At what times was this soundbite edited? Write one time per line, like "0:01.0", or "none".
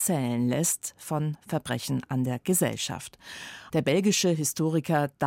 0:03.7